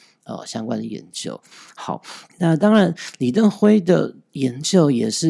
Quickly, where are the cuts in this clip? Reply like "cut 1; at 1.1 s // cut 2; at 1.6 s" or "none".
cut 1; at 2.3 s